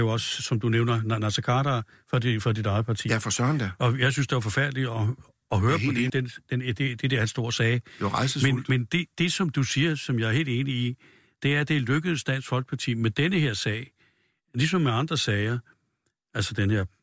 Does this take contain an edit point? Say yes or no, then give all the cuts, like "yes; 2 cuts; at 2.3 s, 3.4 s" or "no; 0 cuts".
yes; 1 cut; at 6.1 s